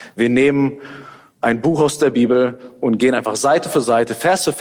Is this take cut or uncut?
uncut